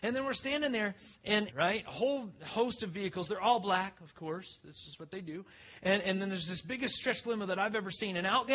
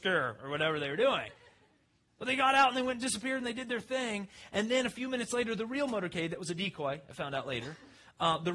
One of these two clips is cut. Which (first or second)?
first